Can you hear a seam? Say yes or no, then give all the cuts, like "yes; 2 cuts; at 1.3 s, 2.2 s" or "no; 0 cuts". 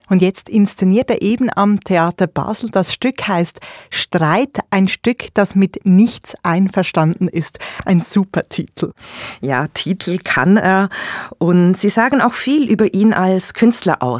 no; 0 cuts